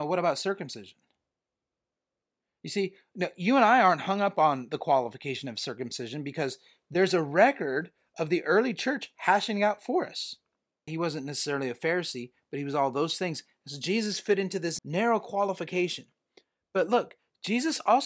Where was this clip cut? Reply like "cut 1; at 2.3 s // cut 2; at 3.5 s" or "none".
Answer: cut 1; at 10.9 s // cut 2; at 14.8 s